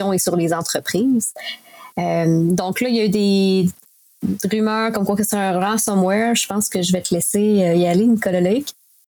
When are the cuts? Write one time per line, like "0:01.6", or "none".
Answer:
none